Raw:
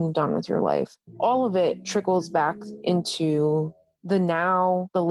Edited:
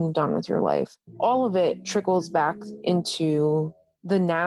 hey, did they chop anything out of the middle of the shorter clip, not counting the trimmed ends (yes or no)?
no